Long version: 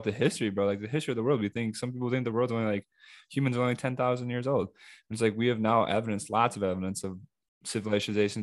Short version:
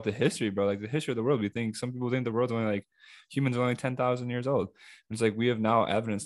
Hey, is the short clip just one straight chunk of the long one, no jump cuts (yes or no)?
yes